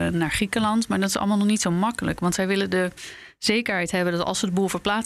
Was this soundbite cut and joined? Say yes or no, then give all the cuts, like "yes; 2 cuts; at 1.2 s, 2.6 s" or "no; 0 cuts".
no; 0 cuts